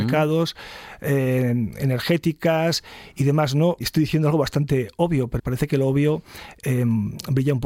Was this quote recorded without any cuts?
no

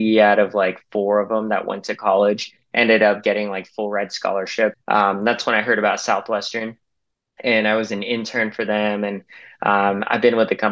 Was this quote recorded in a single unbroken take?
no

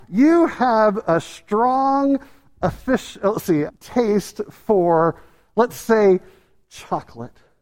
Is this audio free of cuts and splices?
no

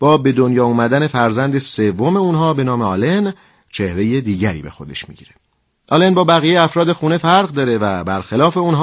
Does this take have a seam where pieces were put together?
no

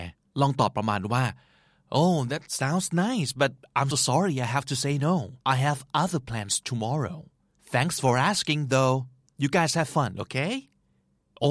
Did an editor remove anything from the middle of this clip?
yes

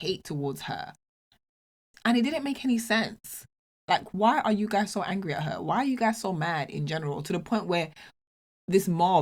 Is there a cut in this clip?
no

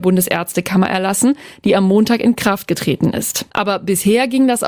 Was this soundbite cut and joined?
yes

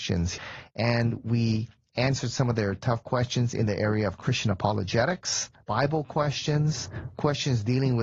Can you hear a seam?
no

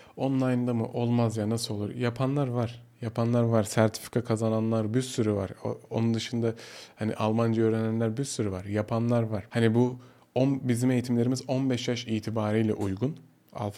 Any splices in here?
no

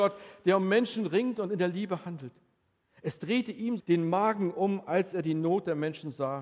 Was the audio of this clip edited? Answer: yes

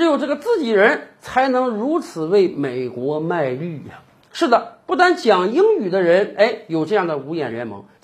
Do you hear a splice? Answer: no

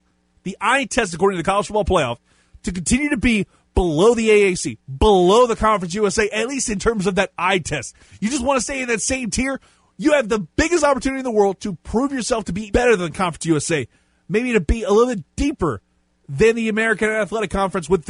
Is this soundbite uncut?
no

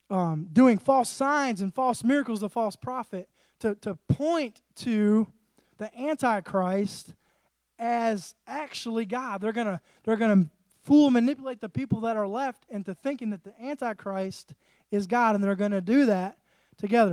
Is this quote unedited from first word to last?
yes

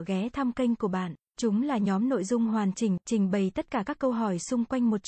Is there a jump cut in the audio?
yes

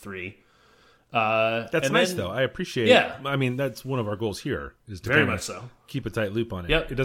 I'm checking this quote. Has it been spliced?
no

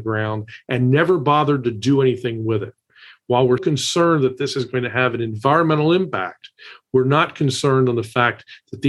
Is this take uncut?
no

